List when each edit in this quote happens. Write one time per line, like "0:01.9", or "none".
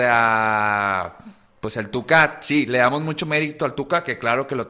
none